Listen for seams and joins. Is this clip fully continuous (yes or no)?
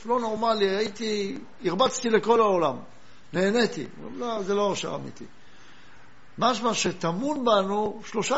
yes